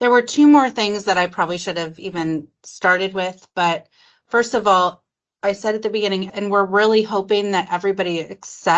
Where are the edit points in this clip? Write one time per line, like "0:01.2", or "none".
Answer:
0:06.3

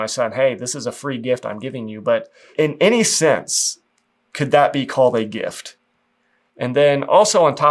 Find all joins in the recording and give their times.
0:06.5

